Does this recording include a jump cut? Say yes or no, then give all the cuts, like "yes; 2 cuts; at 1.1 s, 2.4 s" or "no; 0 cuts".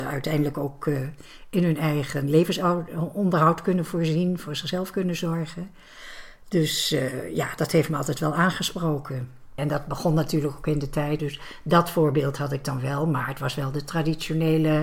yes; 2 cuts; at 9.6 s, 11.2 s